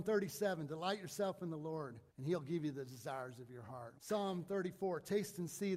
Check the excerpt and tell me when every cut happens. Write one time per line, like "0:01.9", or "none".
0:02.1
0:04.0